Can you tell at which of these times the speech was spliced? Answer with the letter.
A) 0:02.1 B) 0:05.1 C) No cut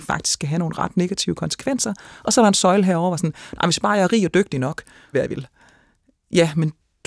B